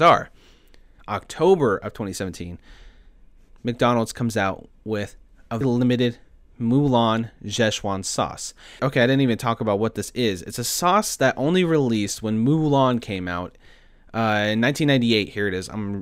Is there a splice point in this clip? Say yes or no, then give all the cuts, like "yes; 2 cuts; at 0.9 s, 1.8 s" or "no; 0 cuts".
yes; 3 cuts; at 1.0 s, 5.6 s, 8.8 s